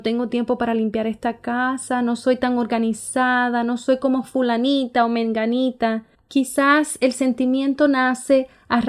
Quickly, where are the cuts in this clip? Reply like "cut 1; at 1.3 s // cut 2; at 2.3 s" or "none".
none